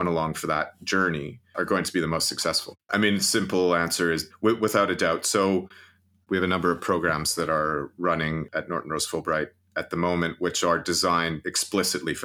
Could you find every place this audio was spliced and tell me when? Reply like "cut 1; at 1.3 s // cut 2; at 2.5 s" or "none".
cut 1; at 2.8 s // cut 2; at 4.3 s